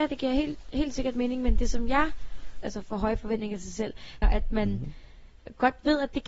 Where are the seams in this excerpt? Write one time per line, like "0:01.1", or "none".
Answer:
0:02.6
0:04.2